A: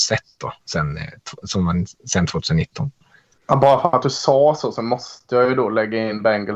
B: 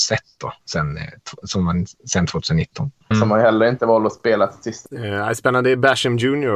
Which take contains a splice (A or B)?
B